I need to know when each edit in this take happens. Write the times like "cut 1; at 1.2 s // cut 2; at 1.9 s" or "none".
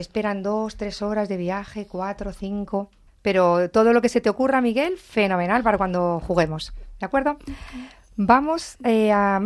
cut 1; at 3.1 s

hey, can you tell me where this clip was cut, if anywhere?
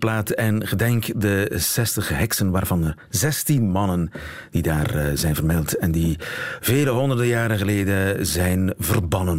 none

